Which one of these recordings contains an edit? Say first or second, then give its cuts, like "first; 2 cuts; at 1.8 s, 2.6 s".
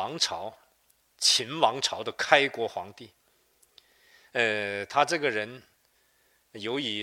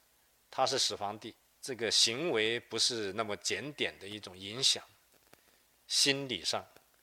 second; 1 cut; at 1.5 s